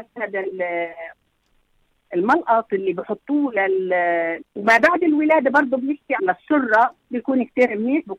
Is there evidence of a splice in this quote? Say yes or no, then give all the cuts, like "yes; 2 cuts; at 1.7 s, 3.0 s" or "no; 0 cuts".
yes; 2 cuts; at 4.4 s, 6.2 s